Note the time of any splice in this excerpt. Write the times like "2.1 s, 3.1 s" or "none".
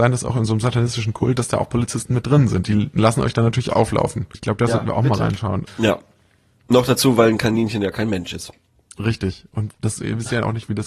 4.3 s, 5.7 s

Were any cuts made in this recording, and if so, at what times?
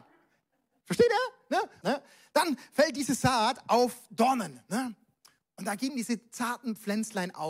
1.8 s

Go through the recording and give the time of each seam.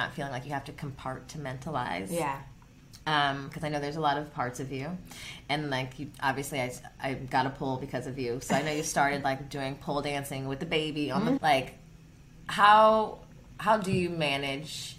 11.4 s

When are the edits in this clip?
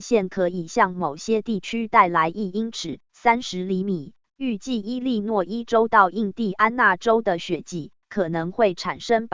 4.3 s

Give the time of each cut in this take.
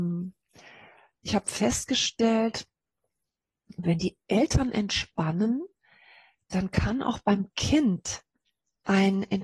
none

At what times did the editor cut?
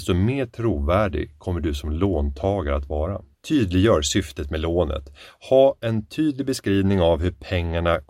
none

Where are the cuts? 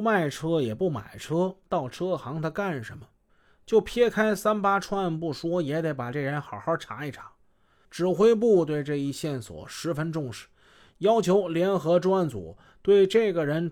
none

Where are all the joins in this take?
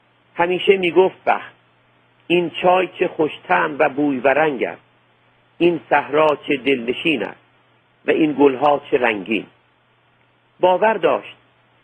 1.2 s

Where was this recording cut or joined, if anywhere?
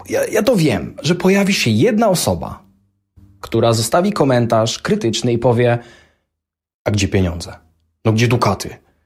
3.4 s

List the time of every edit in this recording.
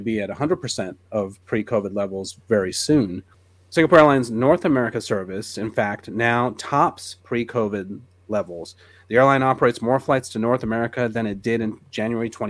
none

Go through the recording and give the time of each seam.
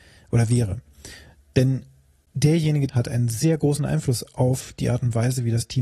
2.9 s

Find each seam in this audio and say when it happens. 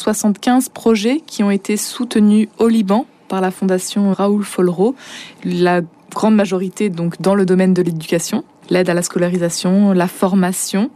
4.1 s, 8.6 s

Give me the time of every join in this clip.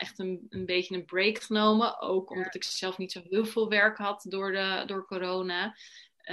none

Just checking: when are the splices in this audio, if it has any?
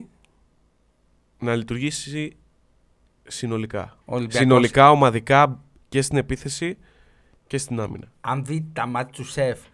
4.0 s

